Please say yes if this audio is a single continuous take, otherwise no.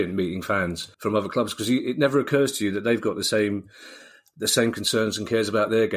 no